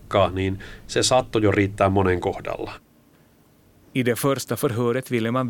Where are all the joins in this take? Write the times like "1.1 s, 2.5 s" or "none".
3.8 s